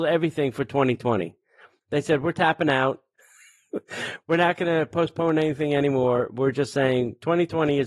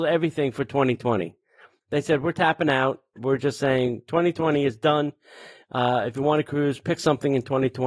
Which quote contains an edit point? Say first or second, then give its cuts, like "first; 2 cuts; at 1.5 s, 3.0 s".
second; 1 cut; at 3.2 s